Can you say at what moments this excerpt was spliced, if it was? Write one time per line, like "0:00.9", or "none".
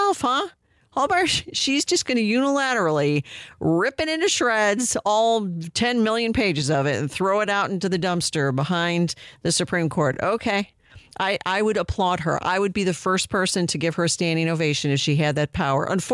none